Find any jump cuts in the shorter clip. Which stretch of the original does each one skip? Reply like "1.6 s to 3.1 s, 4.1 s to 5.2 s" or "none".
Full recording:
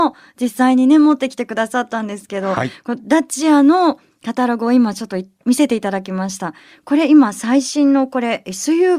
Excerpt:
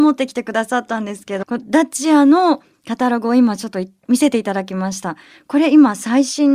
2.4 s to 2.8 s